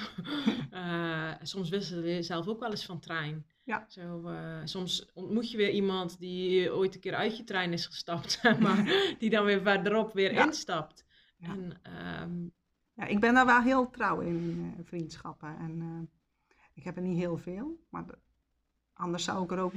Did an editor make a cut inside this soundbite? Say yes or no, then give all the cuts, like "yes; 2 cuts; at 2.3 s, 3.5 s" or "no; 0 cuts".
no; 0 cuts